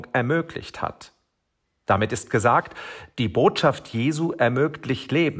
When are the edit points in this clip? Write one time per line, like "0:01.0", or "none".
none